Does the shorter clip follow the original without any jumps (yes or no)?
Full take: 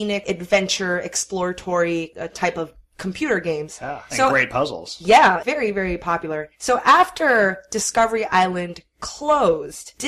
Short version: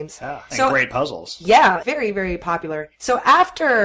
yes